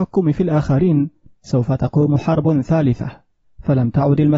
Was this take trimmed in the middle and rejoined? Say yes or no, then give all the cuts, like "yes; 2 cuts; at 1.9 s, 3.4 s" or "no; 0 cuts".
no; 0 cuts